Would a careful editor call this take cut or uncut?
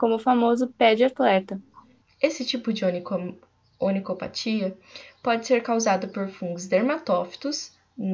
cut